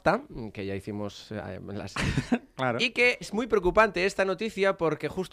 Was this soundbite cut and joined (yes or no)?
yes